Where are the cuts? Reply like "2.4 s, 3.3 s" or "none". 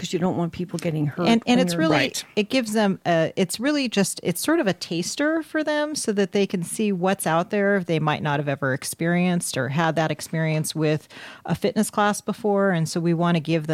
none